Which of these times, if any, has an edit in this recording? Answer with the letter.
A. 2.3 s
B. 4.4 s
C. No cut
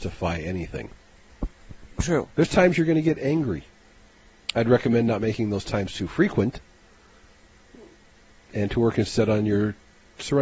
A